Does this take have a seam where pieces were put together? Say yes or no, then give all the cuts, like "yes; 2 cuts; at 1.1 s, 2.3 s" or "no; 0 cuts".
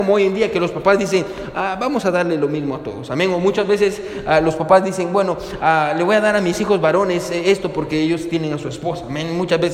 no; 0 cuts